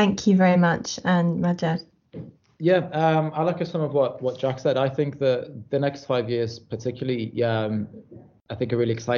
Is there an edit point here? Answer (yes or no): no